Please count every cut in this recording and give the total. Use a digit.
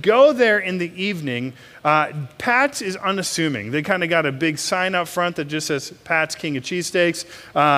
0